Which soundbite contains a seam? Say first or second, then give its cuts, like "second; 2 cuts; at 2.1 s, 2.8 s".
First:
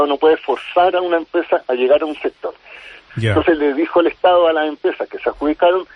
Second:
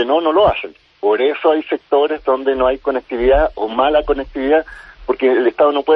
first; 1 cut; at 3.1 s